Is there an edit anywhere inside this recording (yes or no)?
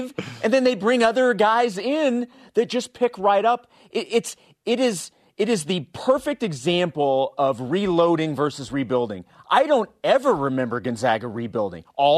no